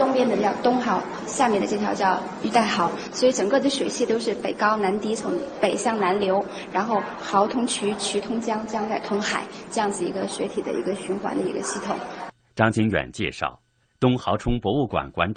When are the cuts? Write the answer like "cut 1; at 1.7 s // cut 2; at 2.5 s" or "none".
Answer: cut 1; at 13.8 s